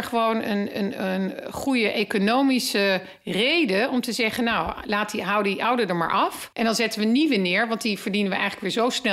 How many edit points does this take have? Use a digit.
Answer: 1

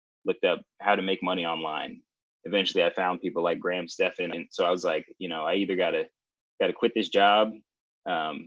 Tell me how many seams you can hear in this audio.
2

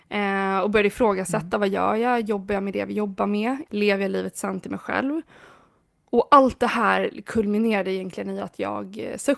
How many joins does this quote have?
1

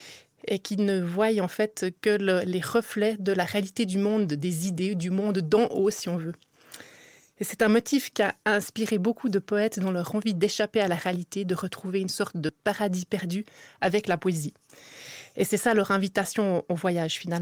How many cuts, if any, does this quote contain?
0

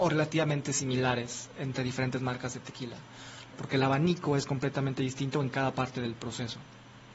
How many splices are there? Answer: 1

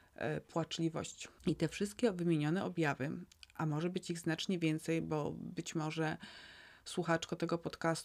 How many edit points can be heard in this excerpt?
1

